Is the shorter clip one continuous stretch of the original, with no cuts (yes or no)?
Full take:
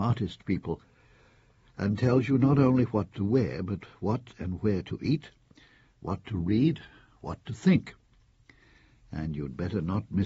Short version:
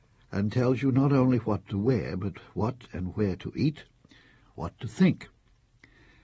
no